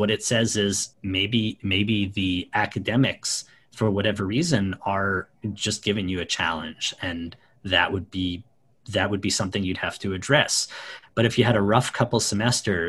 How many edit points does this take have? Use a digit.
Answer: 1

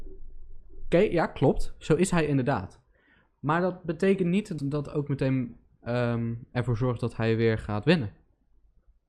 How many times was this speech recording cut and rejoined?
1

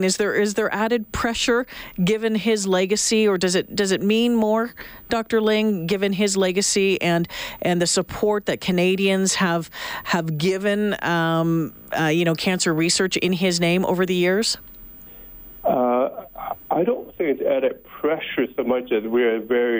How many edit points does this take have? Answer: 0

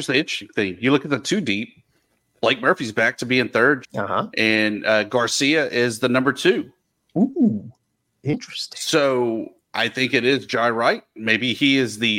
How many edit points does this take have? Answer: 1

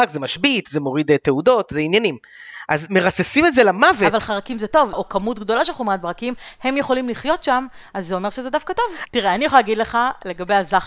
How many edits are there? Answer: 2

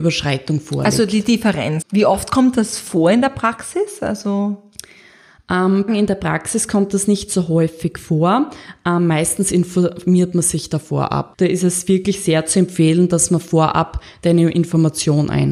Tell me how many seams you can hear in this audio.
3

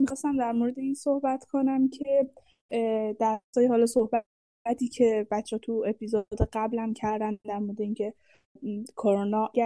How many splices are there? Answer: 0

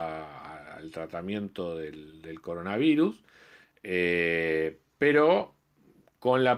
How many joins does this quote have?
0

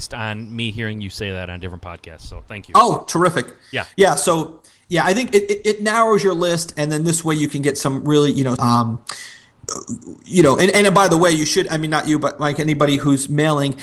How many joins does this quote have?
1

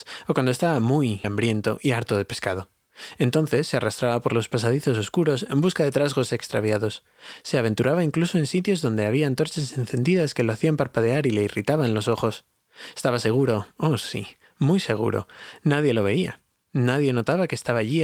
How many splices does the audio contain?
1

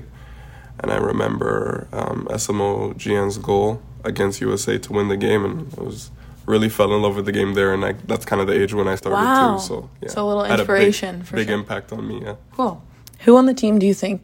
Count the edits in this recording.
0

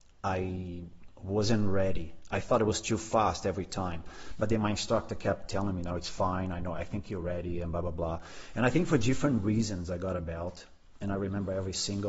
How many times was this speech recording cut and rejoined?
0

